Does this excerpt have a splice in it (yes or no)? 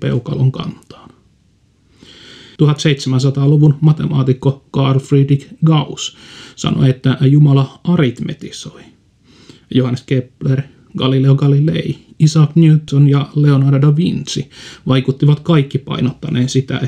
yes